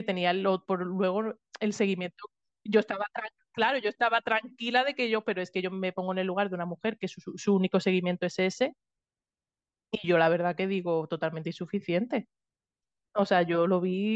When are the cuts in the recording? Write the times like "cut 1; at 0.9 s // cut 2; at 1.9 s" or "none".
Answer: none

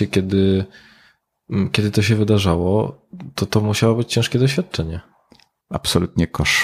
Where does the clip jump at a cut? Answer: cut 1; at 5.6 s

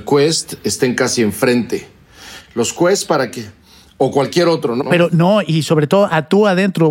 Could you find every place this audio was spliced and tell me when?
cut 1; at 4.8 s

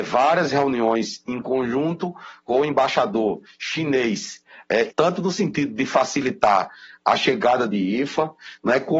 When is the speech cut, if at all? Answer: cut 1; at 4.9 s

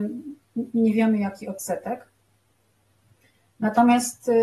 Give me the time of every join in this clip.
none

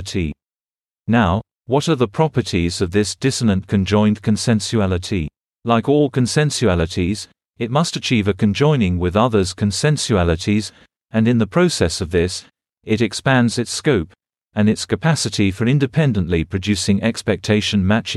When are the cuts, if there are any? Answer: cut 1; at 7.4 s

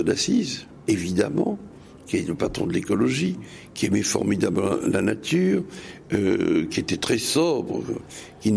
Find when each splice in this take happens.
none

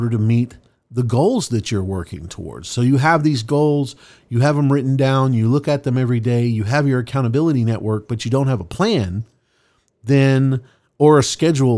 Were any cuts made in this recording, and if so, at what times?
none

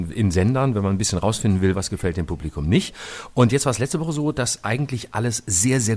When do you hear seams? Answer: cut 1; at 1.7 s

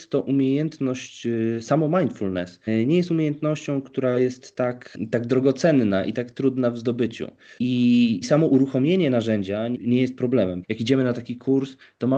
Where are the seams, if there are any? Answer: cut 1; at 7.6 s // cut 2; at 10.6 s

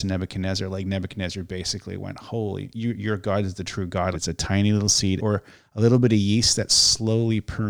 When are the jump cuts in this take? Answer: cut 1; at 4.1 s // cut 2; at 5.2 s

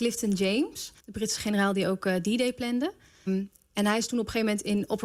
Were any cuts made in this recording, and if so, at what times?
cut 1; at 1.0 s // cut 2; at 3.3 s

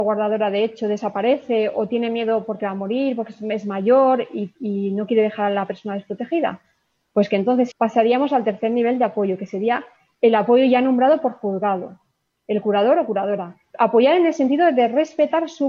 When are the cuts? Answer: cut 1; at 7.7 s // cut 2; at 13.6 s

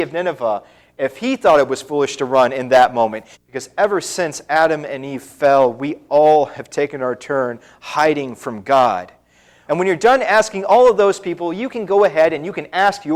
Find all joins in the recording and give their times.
cut 1; at 3.3 s // cut 2; at 9.7 s

